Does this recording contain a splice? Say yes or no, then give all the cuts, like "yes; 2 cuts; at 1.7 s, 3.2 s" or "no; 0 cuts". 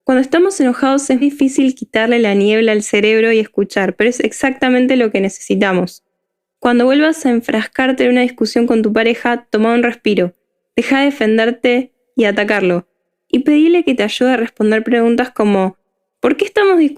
yes; 1 cut; at 1.2 s